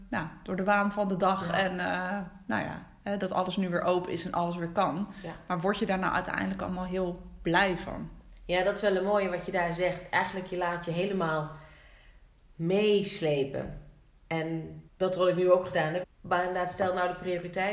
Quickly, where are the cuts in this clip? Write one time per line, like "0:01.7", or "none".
0:14.9
0:16.0